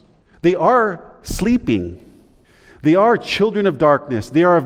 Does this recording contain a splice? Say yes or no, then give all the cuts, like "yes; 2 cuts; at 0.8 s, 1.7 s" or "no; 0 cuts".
no; 0 cuts